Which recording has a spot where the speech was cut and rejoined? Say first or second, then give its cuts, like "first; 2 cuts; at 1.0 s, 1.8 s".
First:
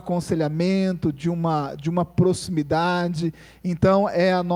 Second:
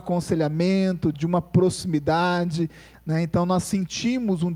second; 2 cuts; at 1.1 s, 2.9 s